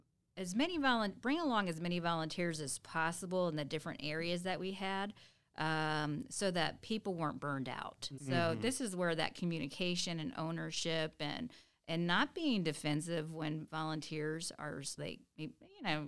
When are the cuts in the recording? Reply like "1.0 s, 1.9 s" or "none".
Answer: 8.2 s, 15.0 s

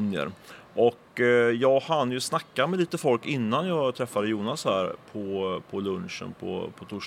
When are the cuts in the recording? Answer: none

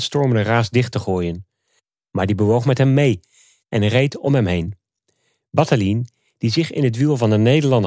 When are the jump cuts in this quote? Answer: none

